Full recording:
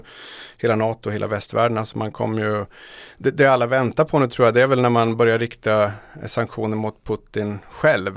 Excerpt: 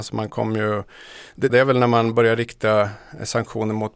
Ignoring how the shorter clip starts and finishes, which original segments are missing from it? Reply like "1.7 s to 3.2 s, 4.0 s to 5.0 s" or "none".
3.3 s to 4.5 s